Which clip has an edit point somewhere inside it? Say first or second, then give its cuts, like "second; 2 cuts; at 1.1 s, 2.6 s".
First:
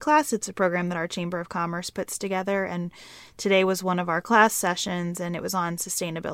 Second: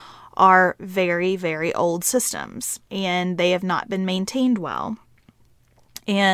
second; 1 cut; at 2.8 s